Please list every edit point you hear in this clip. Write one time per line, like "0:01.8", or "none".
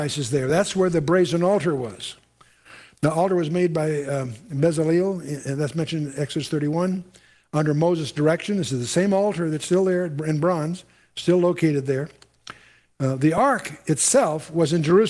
none